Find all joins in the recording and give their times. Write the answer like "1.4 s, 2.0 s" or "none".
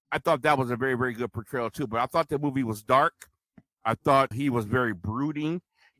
4.3 s

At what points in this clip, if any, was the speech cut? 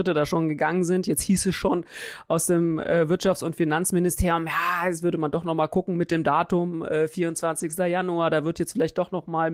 none

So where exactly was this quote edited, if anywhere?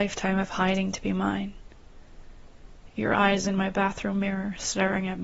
2.9 s

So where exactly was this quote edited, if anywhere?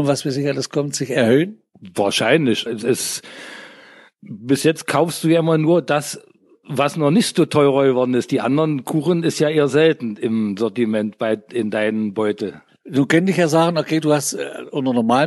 2.7 s

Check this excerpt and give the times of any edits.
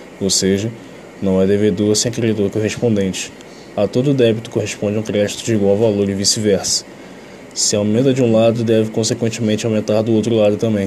none

